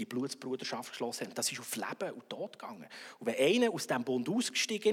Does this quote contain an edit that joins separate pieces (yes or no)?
no